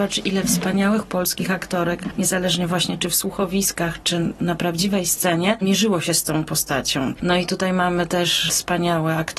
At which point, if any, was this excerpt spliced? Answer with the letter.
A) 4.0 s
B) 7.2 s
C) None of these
B